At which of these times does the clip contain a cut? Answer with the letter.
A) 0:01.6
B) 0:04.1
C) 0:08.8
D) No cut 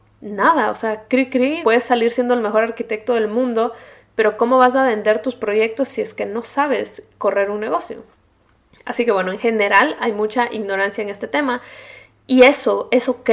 A